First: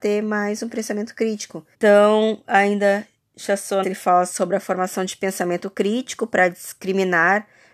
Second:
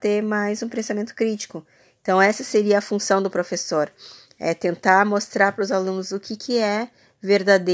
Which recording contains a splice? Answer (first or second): first